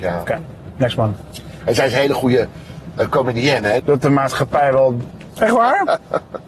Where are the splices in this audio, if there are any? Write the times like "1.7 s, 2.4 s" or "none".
3.8 s, 5.3 s